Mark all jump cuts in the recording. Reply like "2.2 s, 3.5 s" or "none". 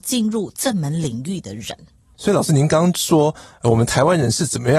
none